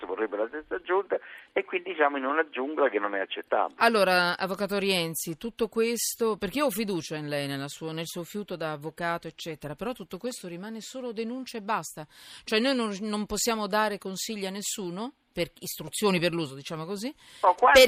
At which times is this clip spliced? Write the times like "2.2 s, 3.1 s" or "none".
none